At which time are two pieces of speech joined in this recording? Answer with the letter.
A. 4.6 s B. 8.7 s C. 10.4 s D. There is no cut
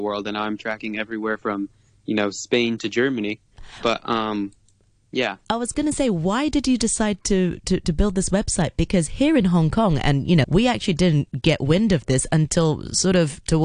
C